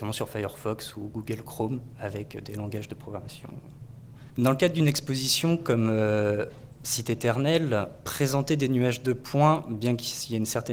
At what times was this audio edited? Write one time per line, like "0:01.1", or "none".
0:04.3